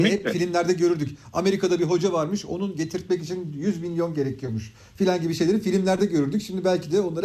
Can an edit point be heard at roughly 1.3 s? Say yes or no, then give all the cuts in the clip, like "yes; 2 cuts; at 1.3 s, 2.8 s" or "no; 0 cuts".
no; 0 cuts